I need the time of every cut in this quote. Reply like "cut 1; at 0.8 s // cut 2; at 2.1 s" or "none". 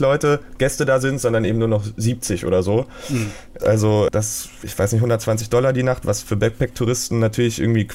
cut 1; at 3.6 s